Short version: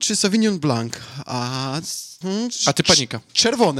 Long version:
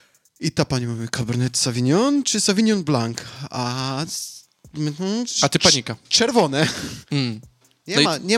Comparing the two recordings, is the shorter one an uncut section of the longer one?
no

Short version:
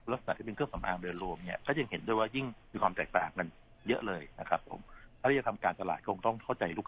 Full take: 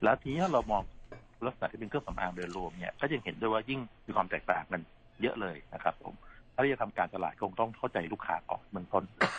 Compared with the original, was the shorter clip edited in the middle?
no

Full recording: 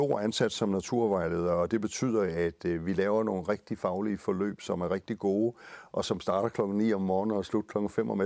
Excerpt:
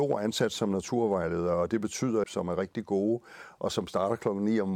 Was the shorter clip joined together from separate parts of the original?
yes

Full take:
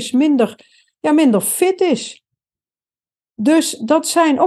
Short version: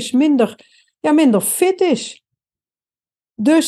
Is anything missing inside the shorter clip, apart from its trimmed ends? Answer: no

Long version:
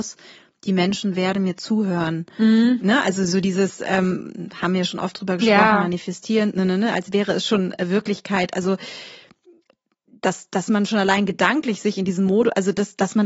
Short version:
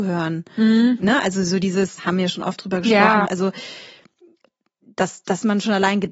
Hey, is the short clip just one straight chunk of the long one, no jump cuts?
no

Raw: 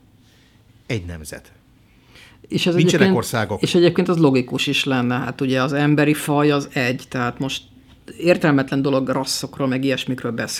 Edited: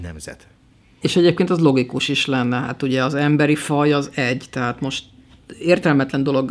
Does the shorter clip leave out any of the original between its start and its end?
yes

